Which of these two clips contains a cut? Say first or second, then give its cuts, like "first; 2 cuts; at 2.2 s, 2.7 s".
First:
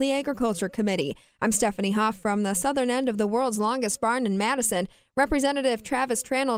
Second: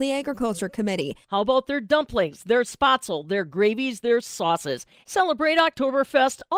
second; 1 cut; at 1.2 s